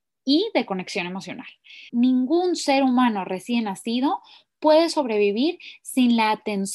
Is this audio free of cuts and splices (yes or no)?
no